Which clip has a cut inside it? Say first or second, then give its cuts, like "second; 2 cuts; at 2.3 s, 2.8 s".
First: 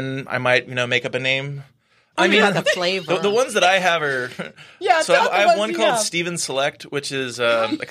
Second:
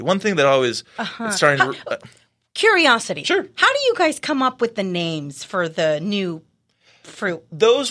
first; 2 cuts; at 2.1 s, 5.2 s